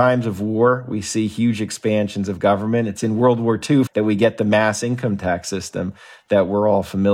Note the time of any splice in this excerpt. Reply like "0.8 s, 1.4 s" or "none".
3.9 s